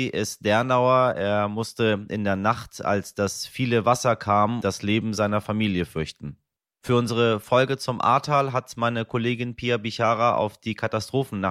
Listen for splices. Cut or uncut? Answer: cut